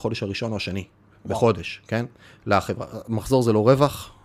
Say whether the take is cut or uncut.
uncut